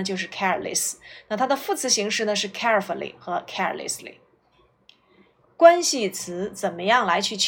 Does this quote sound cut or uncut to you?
cut